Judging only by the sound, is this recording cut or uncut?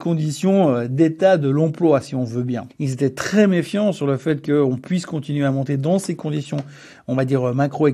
cut